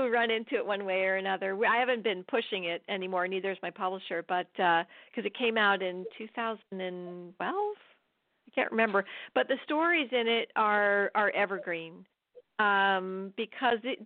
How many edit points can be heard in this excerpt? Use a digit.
0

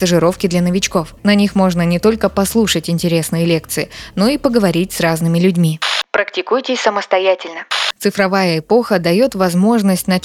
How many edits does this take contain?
1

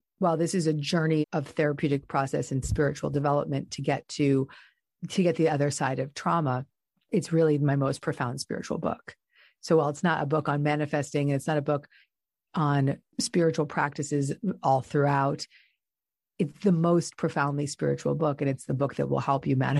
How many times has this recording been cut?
1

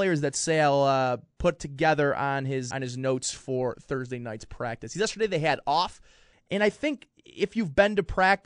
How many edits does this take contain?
2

